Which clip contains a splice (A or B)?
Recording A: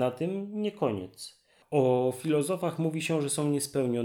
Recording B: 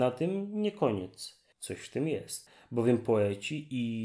B